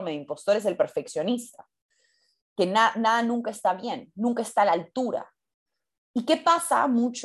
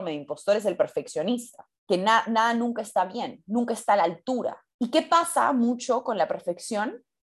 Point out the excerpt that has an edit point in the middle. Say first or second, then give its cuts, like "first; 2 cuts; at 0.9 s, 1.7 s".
second; 2 cuts; at 1.8 s, 4.7 s